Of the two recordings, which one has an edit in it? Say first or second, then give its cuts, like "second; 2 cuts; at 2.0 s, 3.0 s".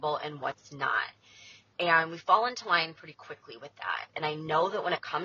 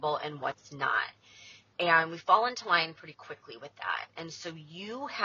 first; 1 cut; at 4.1 s